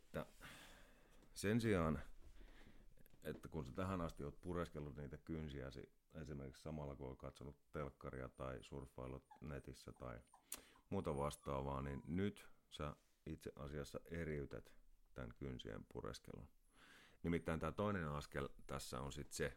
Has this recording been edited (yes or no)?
yes